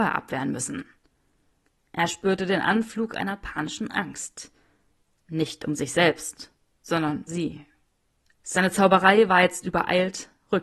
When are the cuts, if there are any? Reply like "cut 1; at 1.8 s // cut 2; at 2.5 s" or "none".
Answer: cut 1; at 7.3 s

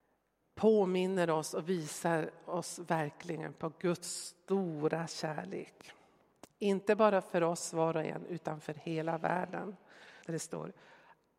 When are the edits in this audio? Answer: cut 1; at 10.2 s

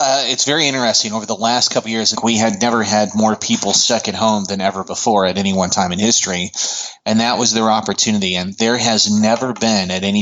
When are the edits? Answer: cut 1; at 2.1 s // cut 2; at 7.0 s

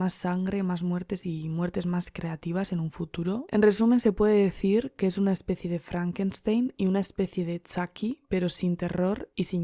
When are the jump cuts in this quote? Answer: none

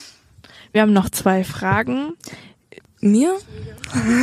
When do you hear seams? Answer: cut 1; at 2.8 s

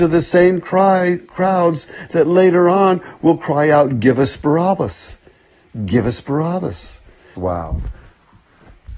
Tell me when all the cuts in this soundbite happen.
cut 1; at 7.4 s

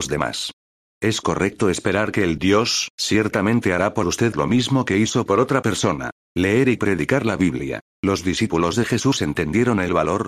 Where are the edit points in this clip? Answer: cut 1; at 2.9 s // cut 2; at 7.9 s

